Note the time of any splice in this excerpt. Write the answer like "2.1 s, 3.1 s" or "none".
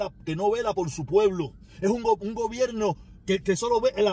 none